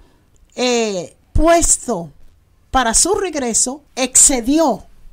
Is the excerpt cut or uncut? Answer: cut